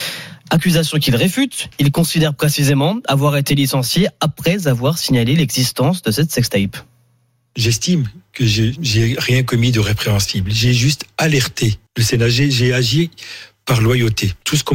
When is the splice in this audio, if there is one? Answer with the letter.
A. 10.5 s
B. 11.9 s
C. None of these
B